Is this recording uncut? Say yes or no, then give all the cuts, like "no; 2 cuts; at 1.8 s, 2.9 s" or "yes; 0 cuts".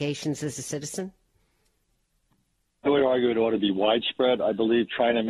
yes; 0 cuts